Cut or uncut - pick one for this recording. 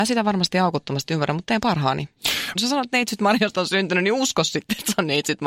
cut